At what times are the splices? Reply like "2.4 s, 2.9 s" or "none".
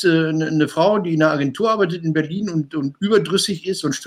none